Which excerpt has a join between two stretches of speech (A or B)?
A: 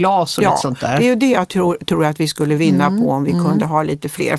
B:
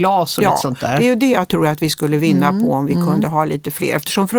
B